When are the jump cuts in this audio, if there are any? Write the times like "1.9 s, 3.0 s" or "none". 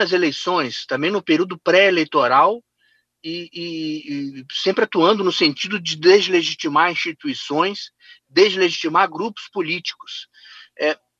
none